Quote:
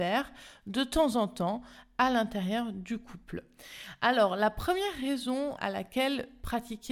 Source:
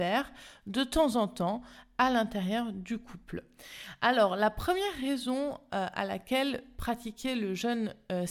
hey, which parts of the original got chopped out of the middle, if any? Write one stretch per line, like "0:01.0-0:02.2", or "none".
0:05.6-0:05.9